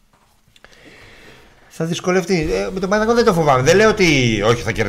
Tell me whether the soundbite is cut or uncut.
uncut